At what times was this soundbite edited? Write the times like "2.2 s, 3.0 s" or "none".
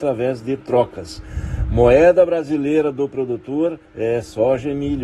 3.9 s

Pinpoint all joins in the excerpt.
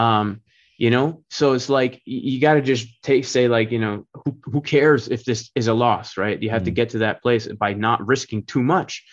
none

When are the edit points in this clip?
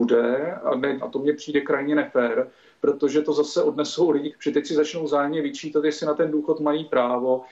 1.0 s, 4.3 s

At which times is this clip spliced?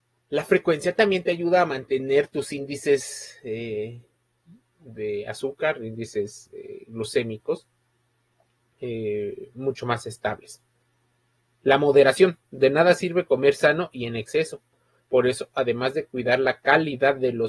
none

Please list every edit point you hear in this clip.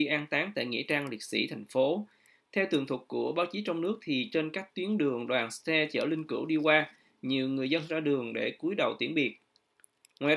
none

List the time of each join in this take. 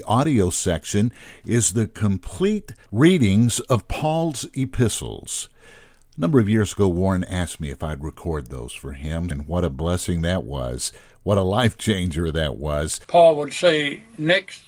9.3 s, 13.0 s

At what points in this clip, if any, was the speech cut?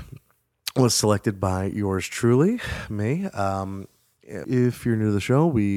4.4 s

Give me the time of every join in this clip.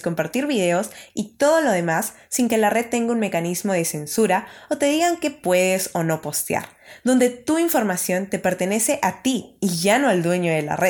none

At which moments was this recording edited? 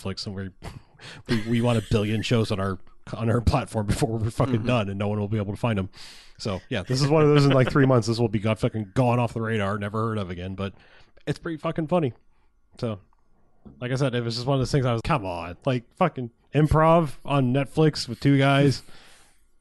15.0 s

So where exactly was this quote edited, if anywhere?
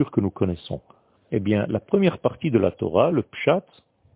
1.2 s

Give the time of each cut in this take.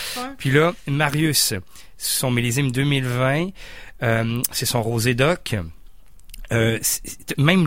none

